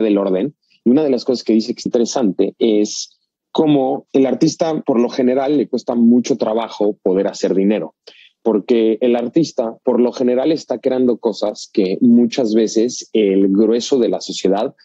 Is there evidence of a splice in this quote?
yes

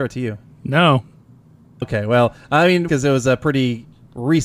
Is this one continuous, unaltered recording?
no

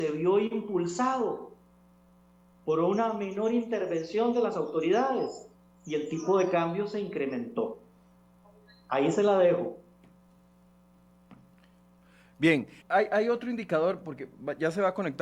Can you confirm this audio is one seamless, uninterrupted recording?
no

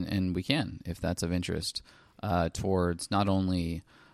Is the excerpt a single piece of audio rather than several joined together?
yes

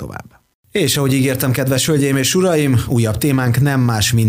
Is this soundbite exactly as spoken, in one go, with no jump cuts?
yes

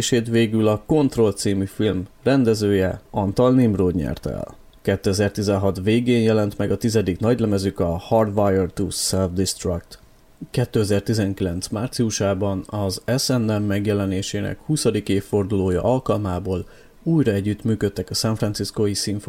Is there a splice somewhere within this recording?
no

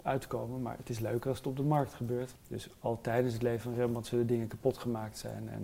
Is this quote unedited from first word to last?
no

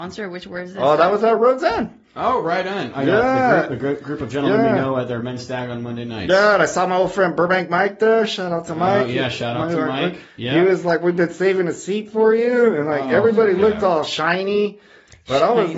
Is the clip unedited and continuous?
yes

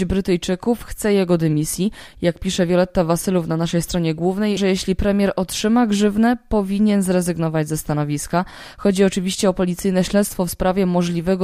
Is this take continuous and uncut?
no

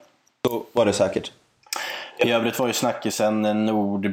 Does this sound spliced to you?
no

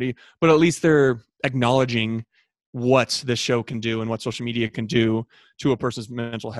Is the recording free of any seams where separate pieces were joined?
yes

